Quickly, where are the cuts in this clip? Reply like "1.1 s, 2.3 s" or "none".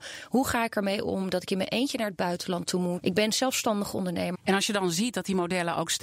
3.0 s, 4.3 s

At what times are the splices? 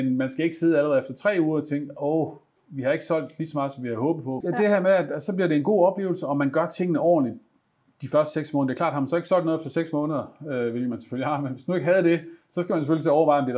4.4 s

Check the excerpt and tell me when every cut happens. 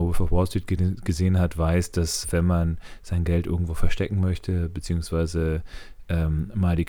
2.2 s

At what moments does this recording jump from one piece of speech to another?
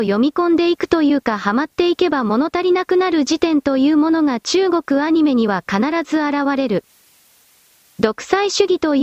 7.9 s

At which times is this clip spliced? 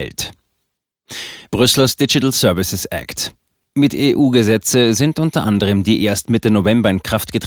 none

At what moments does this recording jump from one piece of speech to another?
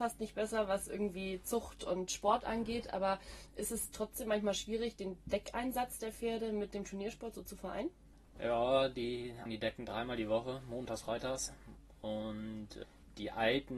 9.5 s, 11.0 s

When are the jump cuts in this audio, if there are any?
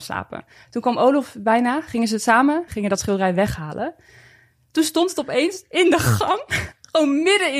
2.7 s

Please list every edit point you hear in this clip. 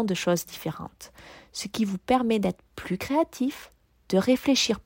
none

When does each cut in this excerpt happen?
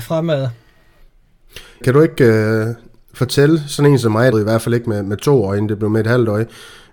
1.8 s, 4.3 s

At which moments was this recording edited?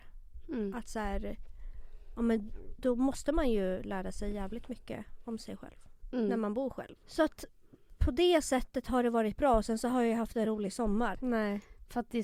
7.0 s, 11.1 s

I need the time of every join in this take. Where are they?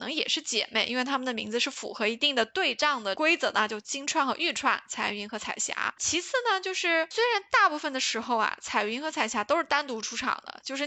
none

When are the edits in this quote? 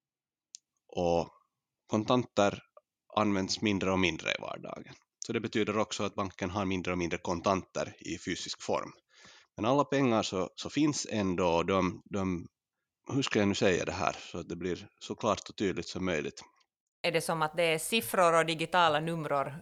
none

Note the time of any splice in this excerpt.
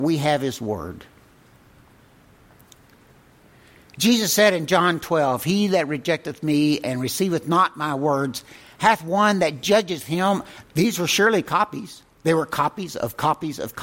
10.6 s, 12.1 s

